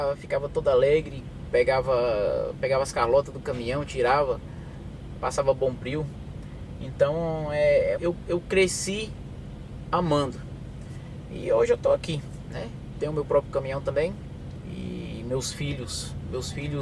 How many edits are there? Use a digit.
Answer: 2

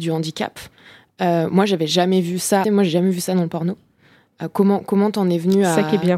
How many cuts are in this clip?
1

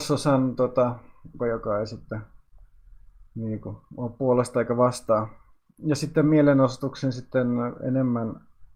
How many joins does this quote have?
2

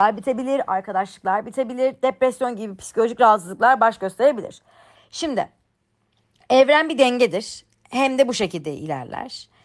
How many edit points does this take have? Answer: 0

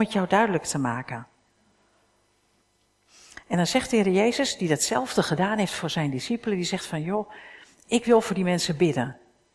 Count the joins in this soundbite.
0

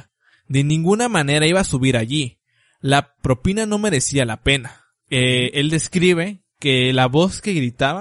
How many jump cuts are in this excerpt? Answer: 2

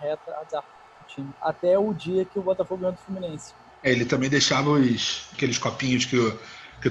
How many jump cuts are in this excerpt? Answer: 3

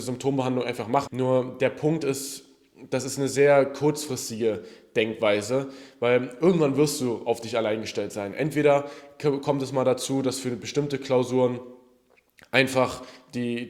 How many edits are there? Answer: 1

